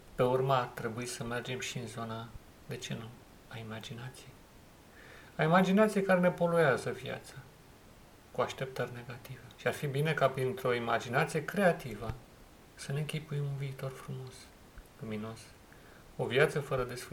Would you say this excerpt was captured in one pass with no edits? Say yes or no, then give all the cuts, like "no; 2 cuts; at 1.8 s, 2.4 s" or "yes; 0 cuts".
no; 1 cut; at 9.5 s